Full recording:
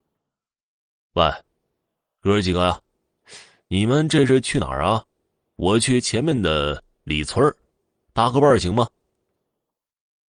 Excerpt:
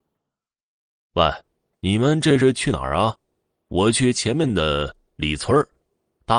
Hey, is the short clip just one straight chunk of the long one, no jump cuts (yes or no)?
no